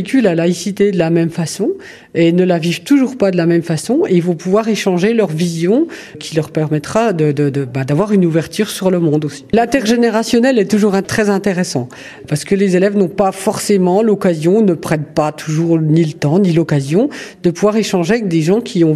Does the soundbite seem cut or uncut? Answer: cut